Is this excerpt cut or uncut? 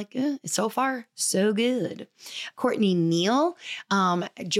cut